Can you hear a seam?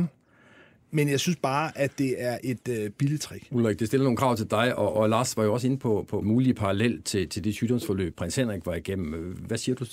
yes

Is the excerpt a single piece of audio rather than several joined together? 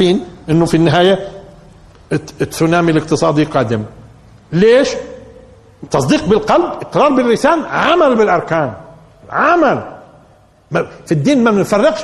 no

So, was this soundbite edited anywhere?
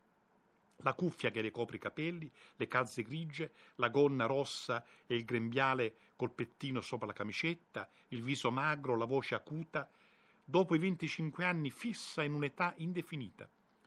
no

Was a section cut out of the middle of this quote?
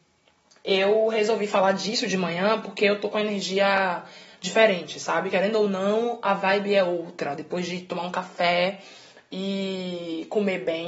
no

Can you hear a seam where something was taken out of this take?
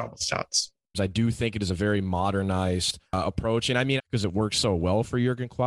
yes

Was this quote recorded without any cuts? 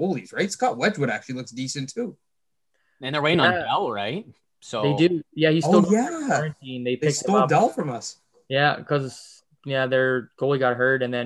yes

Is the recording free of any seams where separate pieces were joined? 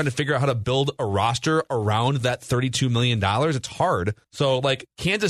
no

